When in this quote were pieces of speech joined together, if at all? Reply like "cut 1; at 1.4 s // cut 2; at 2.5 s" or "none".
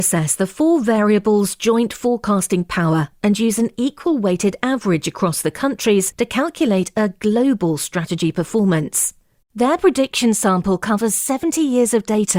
cut 1; at 9.4 s